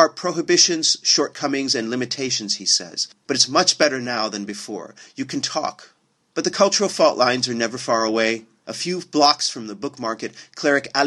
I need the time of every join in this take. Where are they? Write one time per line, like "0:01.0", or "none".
none